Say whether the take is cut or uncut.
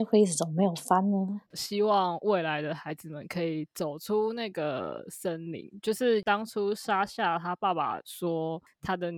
cut